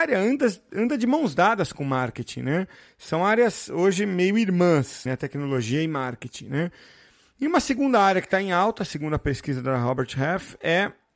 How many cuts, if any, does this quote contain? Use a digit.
1